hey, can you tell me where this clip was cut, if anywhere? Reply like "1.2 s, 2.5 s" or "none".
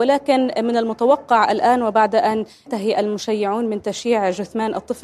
2.7 s